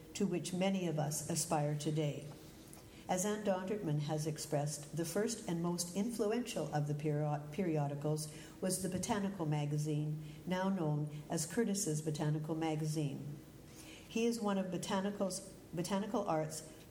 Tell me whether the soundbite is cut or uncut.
cut